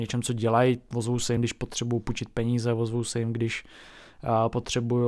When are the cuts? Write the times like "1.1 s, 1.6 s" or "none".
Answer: none